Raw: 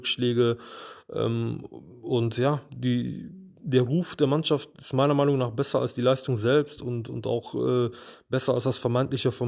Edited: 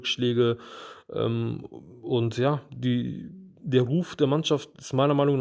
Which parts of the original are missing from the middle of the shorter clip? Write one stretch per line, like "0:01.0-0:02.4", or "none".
none